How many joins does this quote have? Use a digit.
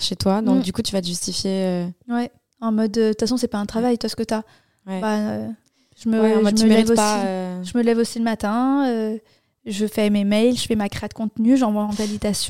0